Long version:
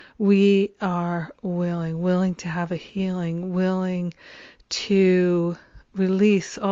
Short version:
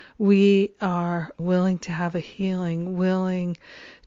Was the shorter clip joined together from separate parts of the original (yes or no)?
yes